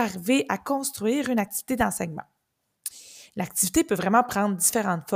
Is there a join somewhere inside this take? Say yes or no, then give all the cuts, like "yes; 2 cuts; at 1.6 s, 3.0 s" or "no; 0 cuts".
no; 0 cuts